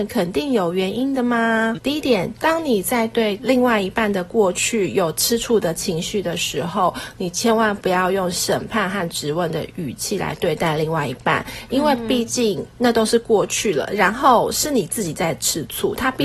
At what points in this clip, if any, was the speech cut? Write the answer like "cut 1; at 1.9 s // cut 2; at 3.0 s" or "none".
cut 1; at 1.7 s